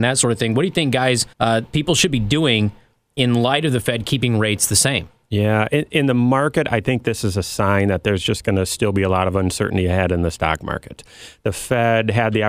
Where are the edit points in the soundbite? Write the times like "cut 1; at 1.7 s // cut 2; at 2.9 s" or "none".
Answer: cut 1; at 1.3 s